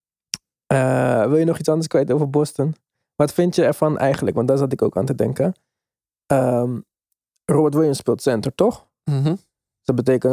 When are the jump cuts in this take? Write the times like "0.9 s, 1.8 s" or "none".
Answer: none